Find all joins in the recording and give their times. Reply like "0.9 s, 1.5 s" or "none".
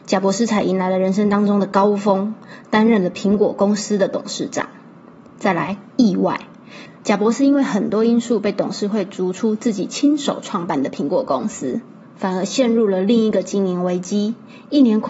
7.0 s, 12.0 s